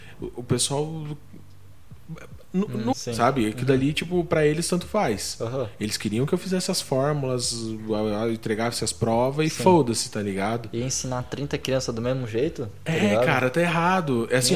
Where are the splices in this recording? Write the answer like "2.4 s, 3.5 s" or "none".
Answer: 2.9 s

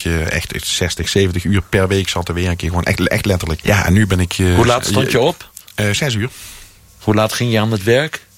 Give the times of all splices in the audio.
3.6 s

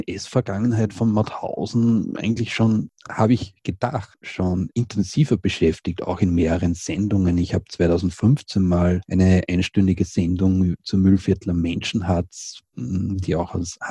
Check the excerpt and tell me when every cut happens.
none

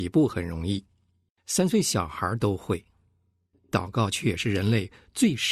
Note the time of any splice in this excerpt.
3.5 s

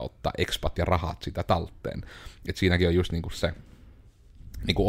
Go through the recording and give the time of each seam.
none

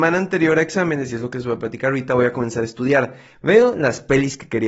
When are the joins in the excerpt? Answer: 3.3 s

